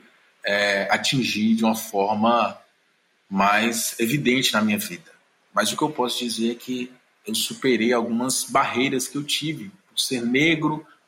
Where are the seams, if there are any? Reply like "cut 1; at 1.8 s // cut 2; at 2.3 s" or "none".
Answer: none